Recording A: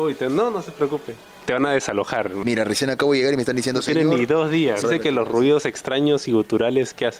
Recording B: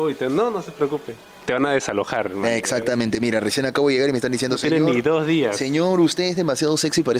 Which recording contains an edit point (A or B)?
A